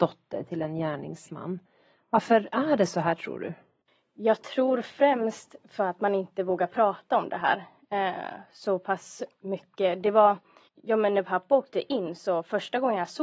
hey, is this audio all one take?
yes; 0 cuts

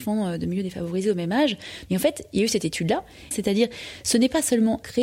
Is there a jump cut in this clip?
yes; 2 cuts; at 1.9 s, 3.3 s

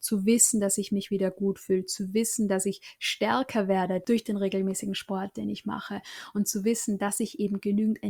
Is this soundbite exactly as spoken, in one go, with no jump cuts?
yes; 0 cuts

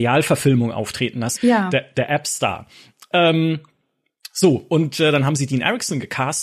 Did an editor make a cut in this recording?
yes; 1 cut; at 1.4 s

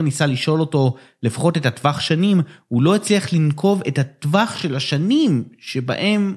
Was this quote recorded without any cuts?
yes; 0 cuts

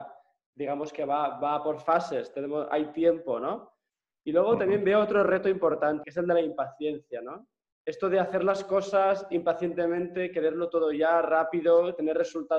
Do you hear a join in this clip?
yes; 1 cut; at 6.0 s

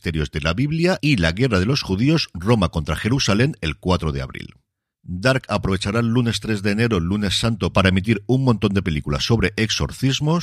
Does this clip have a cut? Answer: no; 0 cuts

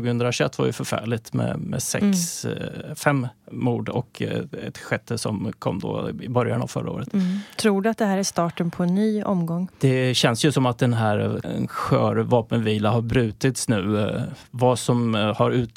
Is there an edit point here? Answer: yes; 2 cuts; at 9.7 s, 11.4 s

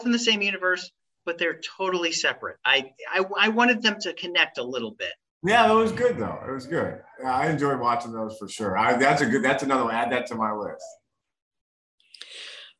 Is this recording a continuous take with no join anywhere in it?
yes; 0 cuts

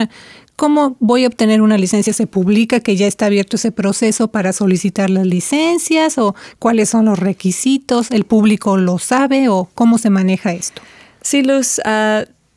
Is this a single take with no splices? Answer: yes; 0 cuts

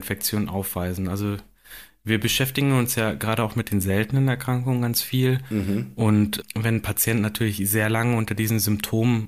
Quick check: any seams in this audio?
no; 0 cuts

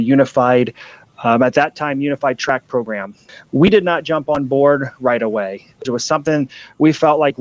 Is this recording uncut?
no; 1 cut; at 5.9 s

